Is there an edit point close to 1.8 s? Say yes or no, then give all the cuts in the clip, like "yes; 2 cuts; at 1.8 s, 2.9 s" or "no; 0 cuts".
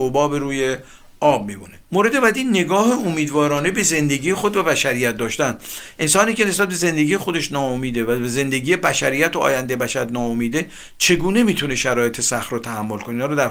yes; 1 cut; at 1.8 s